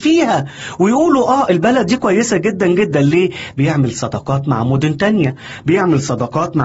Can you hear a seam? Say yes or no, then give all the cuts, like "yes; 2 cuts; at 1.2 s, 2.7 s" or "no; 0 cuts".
yes; 1 cut; at 3.5 s